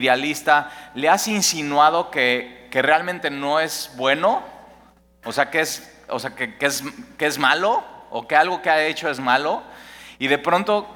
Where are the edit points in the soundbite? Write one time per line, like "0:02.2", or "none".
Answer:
none